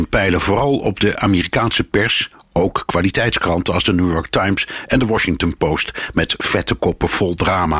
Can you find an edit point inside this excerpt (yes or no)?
no